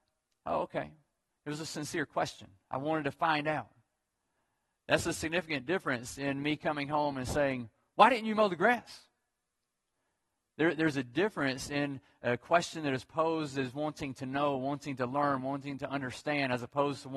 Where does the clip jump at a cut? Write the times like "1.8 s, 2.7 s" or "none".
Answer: none